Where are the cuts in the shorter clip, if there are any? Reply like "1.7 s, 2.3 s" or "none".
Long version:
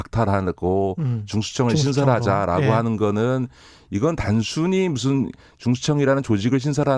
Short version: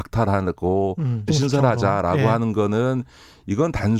1.3 s